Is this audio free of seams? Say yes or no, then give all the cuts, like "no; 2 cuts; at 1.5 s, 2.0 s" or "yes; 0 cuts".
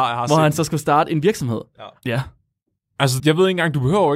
no; 2 cuts; at 2.0 s, 3.2 s